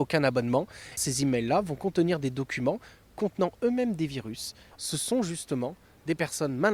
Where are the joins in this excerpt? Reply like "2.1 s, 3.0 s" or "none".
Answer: 1.0 s, 4.7 s